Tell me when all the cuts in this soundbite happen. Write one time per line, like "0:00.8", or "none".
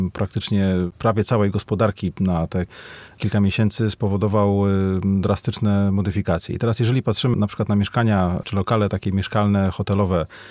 0:07.3